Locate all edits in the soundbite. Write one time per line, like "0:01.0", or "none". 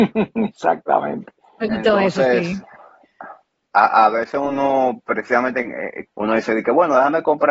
0:06.1